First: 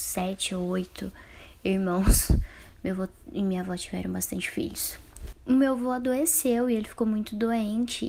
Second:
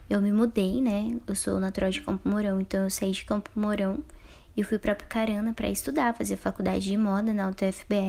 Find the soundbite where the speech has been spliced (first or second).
first